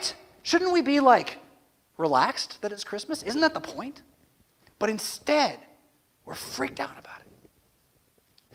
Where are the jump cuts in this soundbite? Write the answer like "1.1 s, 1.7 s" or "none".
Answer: none